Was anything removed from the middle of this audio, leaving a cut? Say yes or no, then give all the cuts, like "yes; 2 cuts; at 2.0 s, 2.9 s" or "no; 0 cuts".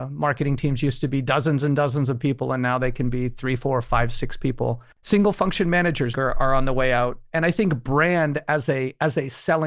yes; 2 cuts; at 4.9 s, 6.1 s